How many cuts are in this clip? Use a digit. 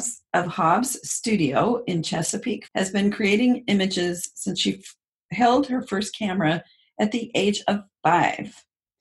1